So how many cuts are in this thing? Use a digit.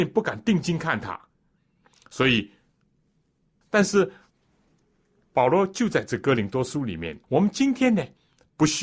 2